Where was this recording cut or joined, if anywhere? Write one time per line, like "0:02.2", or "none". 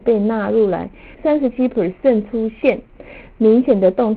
0:01.1